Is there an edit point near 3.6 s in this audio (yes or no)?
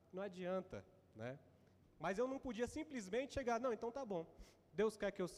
no